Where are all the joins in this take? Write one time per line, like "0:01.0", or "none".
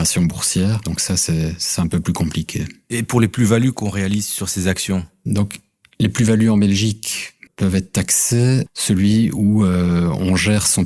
0:07.5
0:08.7